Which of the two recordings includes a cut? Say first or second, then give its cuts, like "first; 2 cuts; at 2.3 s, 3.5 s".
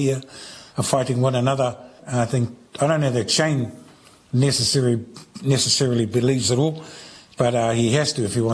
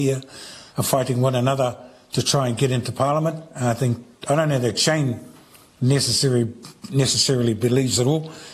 first; 1 cut; at 2.0 s